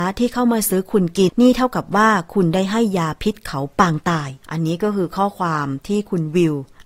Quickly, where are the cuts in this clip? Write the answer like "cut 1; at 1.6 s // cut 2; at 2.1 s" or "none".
cut 1; at 1.3 s // cut 2; at 4.4 s